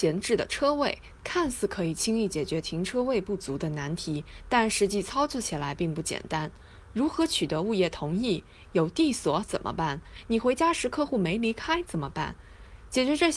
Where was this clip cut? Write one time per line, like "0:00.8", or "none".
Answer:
none